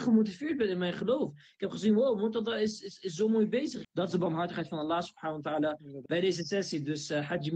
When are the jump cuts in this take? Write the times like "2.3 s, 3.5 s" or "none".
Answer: 3.8 s, 6.1 s